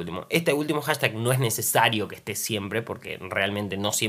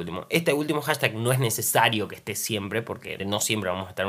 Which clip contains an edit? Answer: second; 1 cut; at 3.2 s

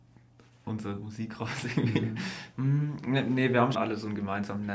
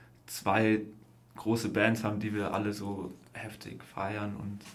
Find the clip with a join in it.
first; 2 cuts; at 2.5 s, 3.7 s

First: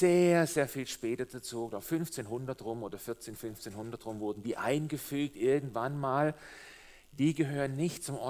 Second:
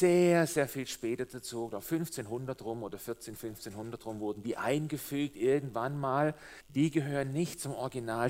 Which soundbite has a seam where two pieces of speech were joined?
second; 1 cut; at 6.6 s

